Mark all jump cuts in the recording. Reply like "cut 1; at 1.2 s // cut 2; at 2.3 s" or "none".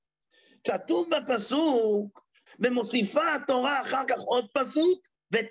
cut 1; at 2.5 s